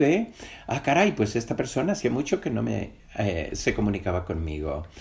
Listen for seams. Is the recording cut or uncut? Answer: uncut